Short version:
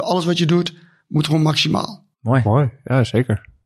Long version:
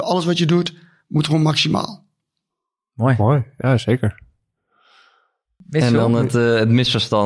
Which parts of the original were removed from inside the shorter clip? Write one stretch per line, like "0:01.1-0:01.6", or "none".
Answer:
0:02.1-0:02.9